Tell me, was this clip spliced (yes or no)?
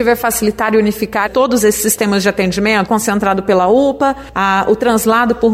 yes